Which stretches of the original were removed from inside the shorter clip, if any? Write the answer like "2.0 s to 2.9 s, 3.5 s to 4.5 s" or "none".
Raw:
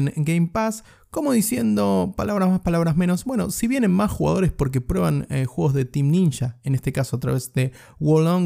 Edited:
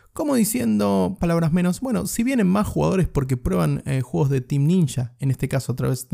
2.2 s to 2.6 s